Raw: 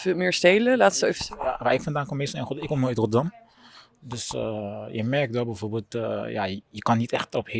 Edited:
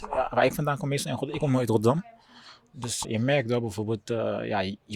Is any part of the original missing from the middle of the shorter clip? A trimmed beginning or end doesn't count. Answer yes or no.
yes